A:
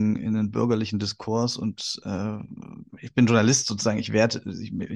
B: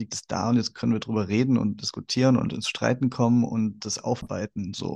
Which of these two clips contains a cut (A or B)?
A